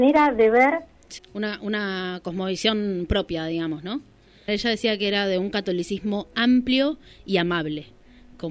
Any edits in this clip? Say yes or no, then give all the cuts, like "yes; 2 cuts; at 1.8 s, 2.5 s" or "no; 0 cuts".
yes; 2 cuts; at 1.2 s, 4.5 s